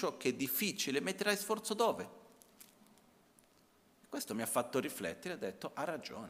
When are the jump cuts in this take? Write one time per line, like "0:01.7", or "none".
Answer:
none